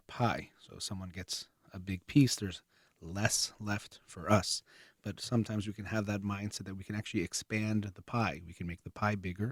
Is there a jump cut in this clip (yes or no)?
no